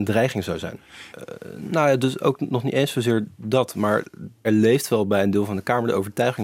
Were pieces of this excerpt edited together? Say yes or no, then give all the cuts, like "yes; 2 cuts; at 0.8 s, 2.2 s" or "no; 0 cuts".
yes; 2 cuts; at 1.1 s, 4.4 s